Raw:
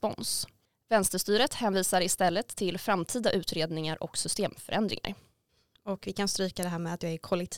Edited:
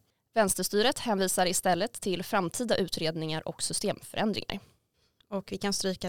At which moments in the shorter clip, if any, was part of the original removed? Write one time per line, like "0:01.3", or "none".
none